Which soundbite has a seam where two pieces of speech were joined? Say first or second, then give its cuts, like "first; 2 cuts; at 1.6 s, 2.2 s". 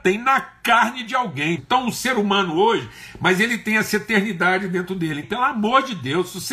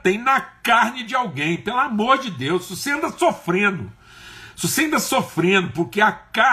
first; 2 cuts; at 1.6 s, 5.2 s